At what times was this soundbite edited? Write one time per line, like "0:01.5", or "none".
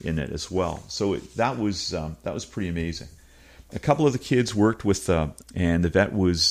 0:05.4